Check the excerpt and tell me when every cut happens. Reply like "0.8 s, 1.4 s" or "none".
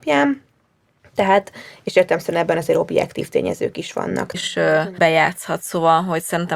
4.3 s